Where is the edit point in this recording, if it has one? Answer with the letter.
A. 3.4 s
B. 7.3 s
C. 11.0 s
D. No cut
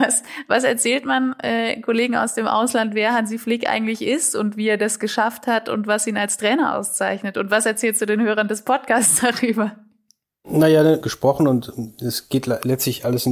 C